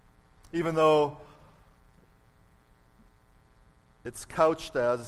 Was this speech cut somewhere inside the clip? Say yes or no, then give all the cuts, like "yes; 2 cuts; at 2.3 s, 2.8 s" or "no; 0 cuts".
no; 0 cuts